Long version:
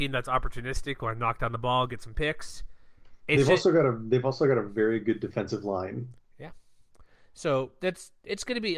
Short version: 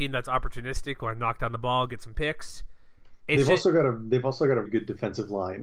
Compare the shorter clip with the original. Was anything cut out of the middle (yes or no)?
yes